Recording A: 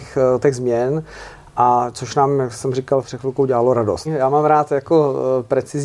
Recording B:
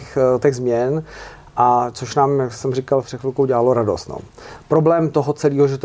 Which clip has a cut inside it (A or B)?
A